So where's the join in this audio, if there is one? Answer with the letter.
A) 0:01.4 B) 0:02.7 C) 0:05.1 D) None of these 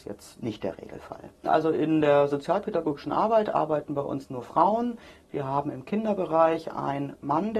A